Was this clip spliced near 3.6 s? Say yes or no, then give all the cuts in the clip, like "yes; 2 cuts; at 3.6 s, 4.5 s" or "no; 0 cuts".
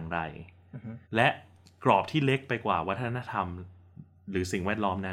no; 1 cut; at 1.0 s